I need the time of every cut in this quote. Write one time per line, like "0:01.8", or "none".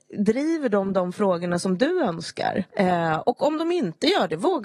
0:02.7